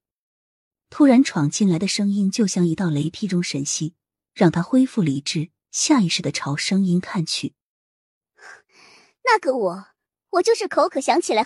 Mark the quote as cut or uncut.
uncut